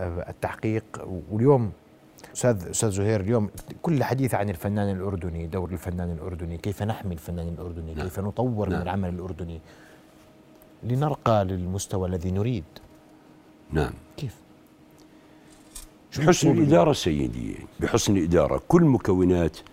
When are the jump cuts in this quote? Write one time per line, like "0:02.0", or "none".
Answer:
0:02.3
0:17.7